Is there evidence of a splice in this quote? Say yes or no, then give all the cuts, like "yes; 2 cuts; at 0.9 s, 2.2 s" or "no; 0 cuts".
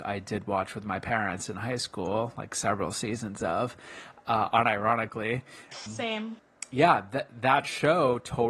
yes; 1 cut; at 5.9 s